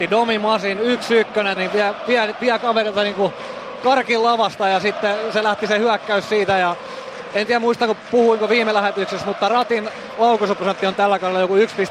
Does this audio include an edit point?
yes; 1 cut; at 1.6 s

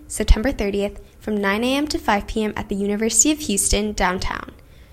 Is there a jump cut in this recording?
no; 0 cuts

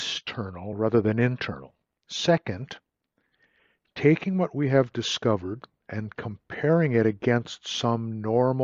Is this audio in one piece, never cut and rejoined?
no; 1 cut; at 2.0 s

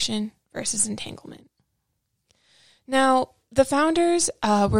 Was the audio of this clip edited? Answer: no; 0 cuts

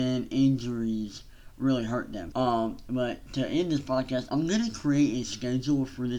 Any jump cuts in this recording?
yes; 2 cuts; at 2.3 s, 4.3 s

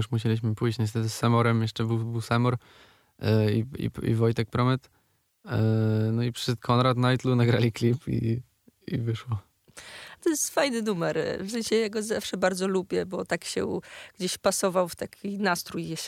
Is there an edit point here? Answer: no; 0 cuts

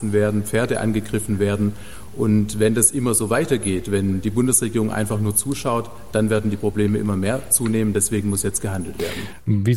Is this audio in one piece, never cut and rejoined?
yes; 0 cuts

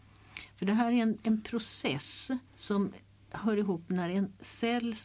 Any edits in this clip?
yes; 1 cut; at 2.5 s

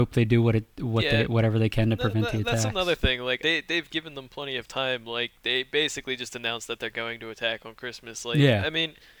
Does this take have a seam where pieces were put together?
yes; 1 cut; at 3.4 s

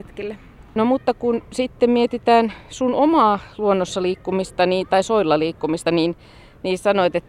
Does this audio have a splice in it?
no; 0 cuts

